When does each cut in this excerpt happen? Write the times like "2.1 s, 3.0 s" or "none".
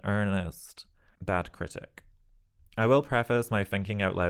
1.1 s

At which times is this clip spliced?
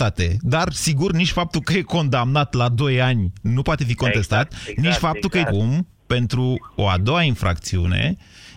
5.5 s

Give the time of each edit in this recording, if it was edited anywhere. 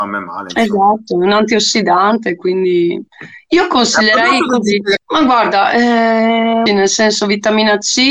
5.0 s, 6.7 s

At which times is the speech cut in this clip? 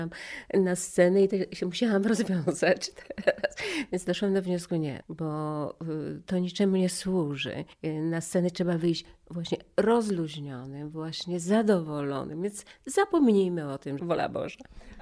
5.0 s, 7.7 s, 14.0 s

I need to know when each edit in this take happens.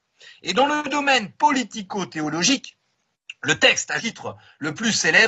4.0 s

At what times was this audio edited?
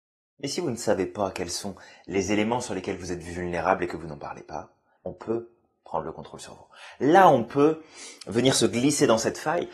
5.0 s

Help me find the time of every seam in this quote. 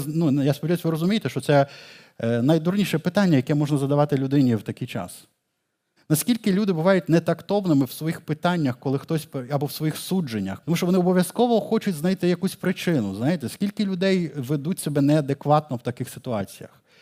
6.0 s, 10.6 s

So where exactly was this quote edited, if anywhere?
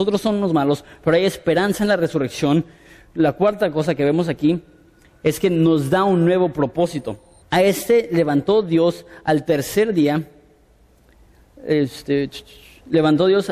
7.4 s

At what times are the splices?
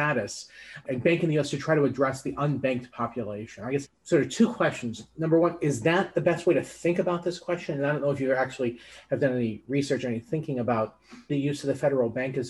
11.3 s

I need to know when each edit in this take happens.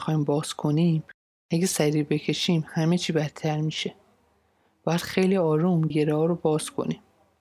5.9 s

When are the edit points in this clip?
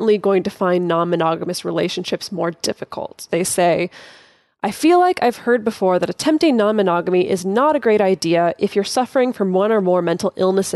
3.3 s

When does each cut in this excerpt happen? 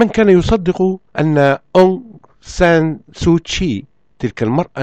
1.1 s

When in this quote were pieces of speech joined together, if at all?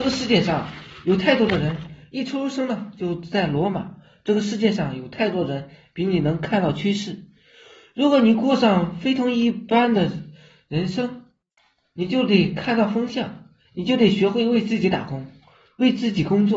none

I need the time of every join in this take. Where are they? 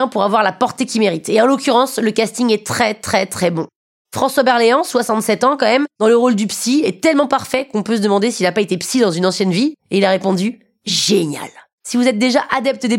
9.8 s, 11.8 s

